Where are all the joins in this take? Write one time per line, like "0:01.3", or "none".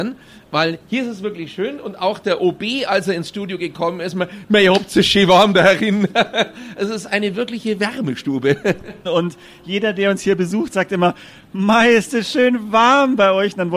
0:09.0